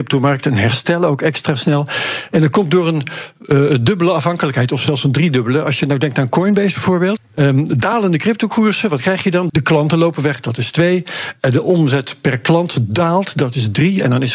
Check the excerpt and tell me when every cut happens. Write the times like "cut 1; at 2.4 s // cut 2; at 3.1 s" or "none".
cut 1; at 7.2 s // cut 2; at 9.5 s